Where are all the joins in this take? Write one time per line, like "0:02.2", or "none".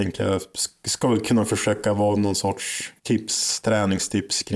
0:03.0